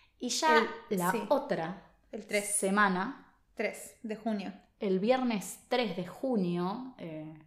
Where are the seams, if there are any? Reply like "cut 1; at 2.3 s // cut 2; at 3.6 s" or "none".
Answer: none